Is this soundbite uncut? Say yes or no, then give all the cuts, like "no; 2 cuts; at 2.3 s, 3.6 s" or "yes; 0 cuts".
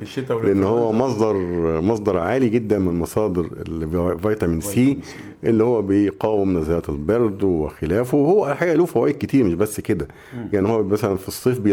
yes; 0 cuts